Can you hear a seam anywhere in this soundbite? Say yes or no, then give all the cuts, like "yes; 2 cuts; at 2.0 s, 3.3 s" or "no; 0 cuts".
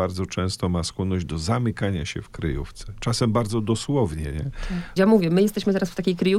yes; 1 cut; at 5.0 s